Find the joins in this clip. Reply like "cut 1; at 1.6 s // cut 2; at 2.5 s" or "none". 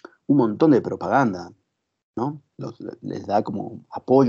none